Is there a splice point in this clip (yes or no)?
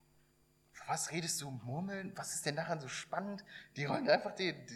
no